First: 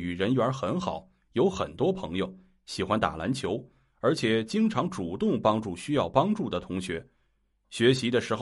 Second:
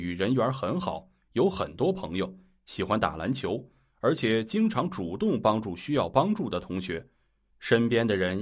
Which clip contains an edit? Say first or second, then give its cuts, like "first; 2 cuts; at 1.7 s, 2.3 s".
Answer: second; 1 cut; at 7.5 s